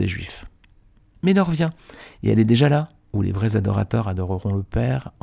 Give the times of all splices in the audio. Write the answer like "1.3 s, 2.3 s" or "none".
none